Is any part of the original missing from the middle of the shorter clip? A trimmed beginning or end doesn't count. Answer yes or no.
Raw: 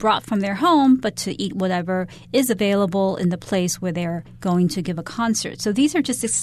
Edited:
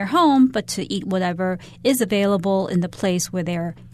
no